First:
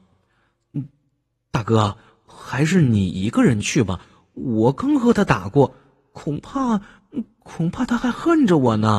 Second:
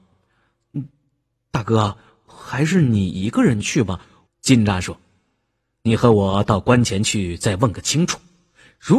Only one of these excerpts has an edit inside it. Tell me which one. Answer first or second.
second